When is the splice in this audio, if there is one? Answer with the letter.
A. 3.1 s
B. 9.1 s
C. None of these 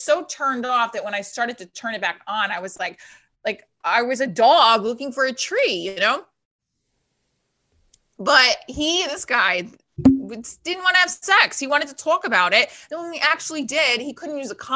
C